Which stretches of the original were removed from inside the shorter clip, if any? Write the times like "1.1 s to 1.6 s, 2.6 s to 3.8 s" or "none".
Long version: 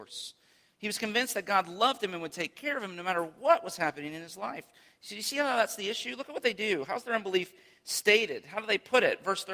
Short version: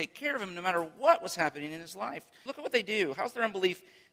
4.9 s to 6.2 s